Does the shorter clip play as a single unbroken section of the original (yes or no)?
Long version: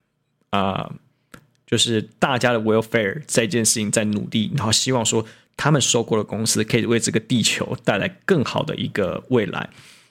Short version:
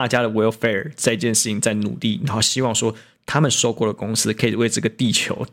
yes